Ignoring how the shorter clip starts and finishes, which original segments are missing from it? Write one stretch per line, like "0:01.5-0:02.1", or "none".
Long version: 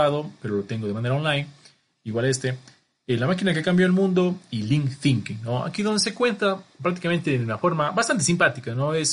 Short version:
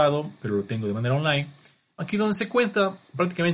0:02.0-0:05.6

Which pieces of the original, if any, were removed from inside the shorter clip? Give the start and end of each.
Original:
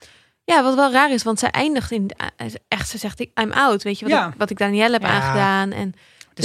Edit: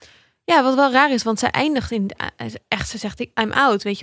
none

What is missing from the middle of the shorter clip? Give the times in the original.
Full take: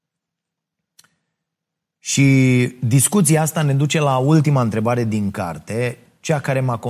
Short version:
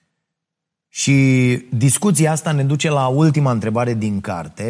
none

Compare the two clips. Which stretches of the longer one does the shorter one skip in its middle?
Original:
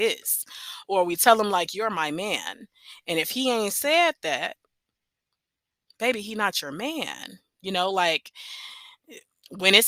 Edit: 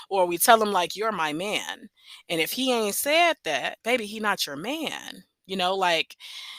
0:04.6-0:06.0

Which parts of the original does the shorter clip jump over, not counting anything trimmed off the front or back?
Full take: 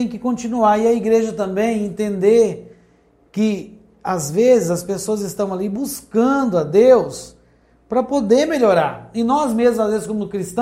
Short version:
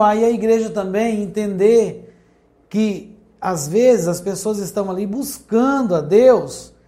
none

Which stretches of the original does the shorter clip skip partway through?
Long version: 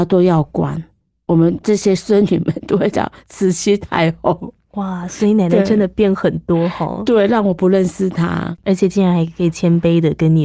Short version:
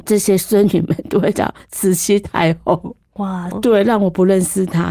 0:05.1-0:07.0

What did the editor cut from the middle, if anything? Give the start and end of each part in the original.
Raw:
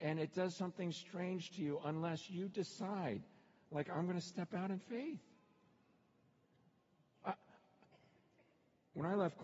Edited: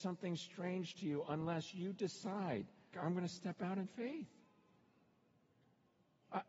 0:03.5-0:03.9

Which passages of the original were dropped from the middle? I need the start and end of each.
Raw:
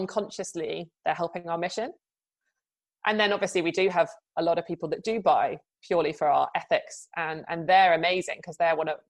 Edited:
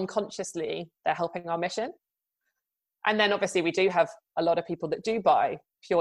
none

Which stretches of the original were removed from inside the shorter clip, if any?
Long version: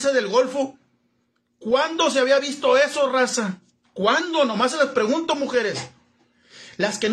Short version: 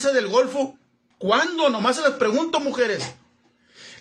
0:01.1-0:03.9

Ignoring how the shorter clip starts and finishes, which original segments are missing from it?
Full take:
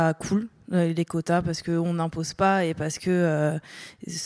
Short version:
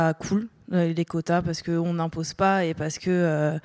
none

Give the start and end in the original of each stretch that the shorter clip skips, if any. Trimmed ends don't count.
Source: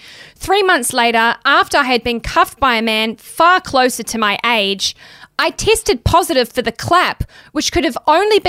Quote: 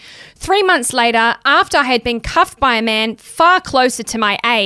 none

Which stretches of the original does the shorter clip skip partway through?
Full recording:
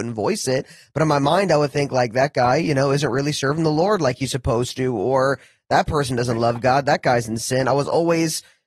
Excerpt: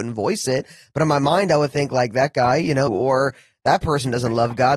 0:02.9-0:04.9

